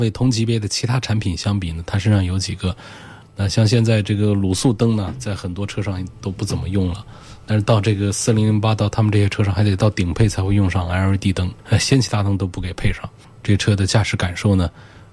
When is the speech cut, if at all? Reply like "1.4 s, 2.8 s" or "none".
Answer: 3.3 s, 13.4 s